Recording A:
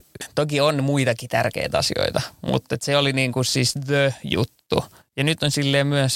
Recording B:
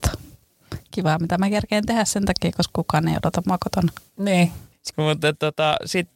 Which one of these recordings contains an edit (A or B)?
B